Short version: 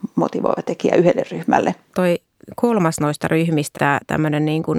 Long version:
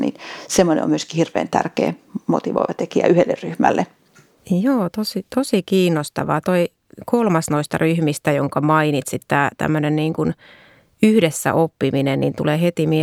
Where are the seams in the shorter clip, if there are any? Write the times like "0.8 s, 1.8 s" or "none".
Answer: 1.9 s, 3.7 s

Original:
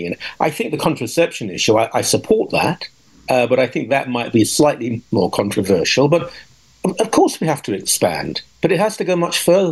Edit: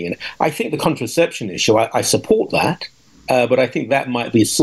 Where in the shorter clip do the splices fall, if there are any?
none

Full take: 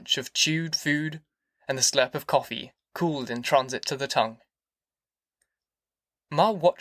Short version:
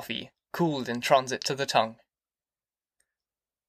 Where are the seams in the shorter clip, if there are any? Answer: none

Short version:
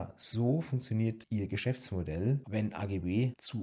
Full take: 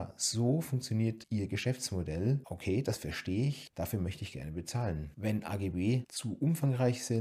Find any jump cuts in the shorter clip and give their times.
2.4 s

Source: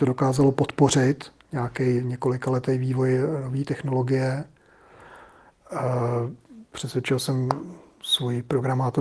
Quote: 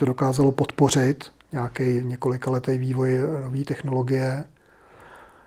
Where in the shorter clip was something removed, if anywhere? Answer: none

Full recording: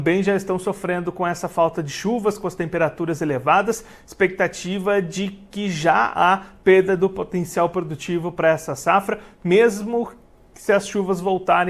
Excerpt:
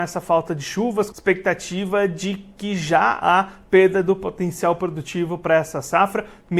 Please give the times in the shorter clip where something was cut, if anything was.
1.1 s

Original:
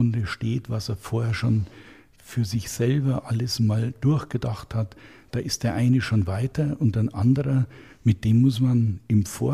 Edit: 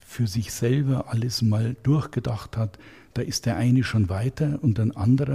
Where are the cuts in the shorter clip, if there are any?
none

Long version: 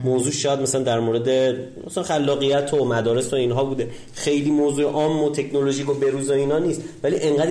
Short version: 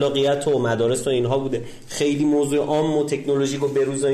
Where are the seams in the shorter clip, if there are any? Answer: none

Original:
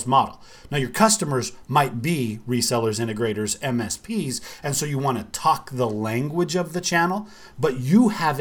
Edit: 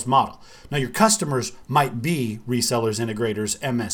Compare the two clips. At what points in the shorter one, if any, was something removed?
none

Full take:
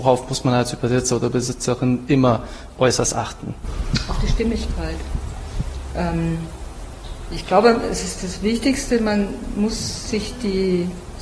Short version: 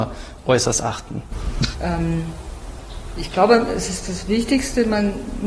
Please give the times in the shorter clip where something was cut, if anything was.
1.7 s

